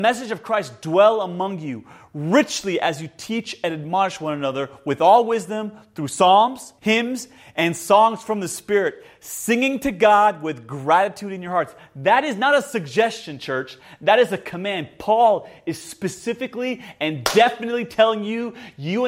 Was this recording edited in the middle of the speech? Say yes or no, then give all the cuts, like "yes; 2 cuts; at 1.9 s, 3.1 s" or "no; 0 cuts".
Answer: yes; 1 cut; at 6.8 s